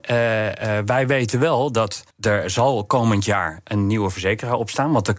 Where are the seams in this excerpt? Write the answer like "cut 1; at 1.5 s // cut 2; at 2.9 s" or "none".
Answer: cut 1; at 2.1 s